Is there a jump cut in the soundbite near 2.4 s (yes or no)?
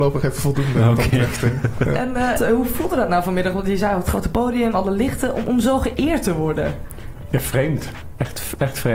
yes